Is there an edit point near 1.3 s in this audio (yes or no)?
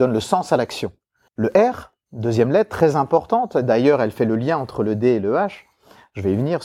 yes